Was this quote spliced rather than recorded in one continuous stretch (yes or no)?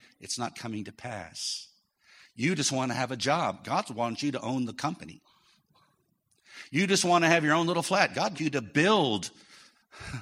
yes